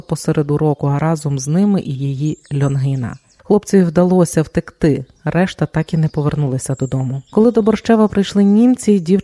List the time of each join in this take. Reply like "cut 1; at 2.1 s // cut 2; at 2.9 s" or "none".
cut 1; at 3.4 s